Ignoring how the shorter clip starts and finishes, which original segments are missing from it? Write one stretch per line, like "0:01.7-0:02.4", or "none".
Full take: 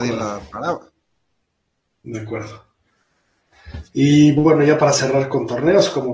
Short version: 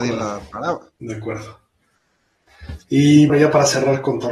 0:01.0-0:02.0
0:04.3-0:04.6